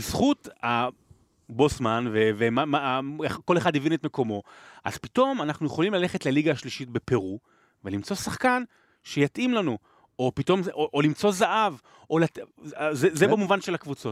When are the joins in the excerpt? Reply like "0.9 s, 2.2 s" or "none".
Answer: none